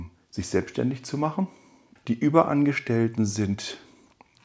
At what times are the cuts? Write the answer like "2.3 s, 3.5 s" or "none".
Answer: 2.0 s